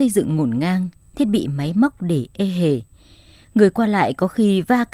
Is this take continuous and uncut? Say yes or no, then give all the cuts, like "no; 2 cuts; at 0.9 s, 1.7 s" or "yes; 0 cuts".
yes; 0 cuts